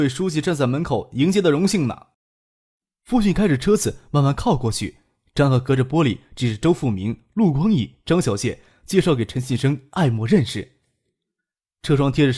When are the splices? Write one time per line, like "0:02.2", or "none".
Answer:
0:02.1